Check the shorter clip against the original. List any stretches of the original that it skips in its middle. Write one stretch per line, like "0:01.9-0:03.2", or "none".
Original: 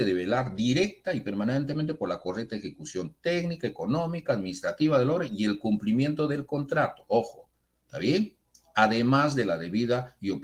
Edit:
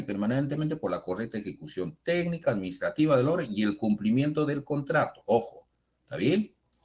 0:03.6-0:04.2